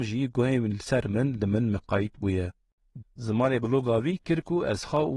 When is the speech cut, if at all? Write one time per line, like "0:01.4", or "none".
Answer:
0:03.0